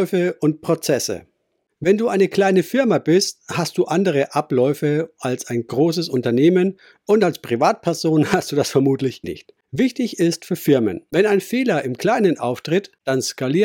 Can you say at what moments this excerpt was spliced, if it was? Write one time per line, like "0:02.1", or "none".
0:09.2